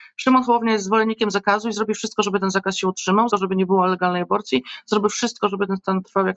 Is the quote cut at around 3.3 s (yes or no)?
yes